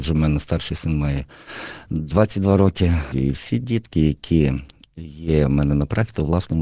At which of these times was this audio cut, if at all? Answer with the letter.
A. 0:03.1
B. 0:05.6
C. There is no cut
A